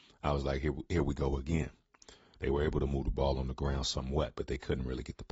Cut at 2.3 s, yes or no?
yes